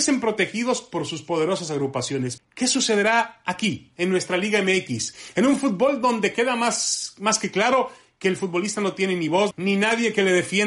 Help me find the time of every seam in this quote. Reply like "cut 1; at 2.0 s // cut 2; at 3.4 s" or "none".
cut 1; at 2.4 s // cut 2; at 9.5 s